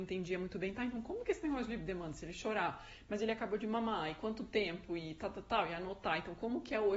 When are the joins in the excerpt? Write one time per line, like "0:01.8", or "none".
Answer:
none